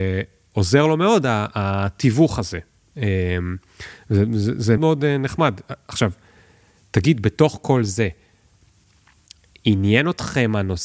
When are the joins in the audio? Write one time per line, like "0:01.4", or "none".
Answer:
0:04.8